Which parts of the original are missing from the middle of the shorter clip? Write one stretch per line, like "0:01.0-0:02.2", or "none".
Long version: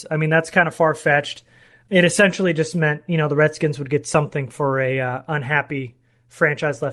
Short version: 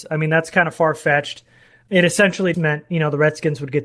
0:02.5-0:02.7